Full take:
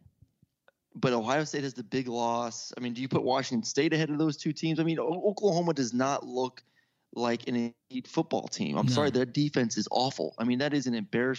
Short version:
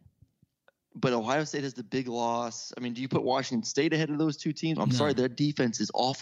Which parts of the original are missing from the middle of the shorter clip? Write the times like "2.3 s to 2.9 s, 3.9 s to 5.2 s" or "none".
4.8 s to 8.7 s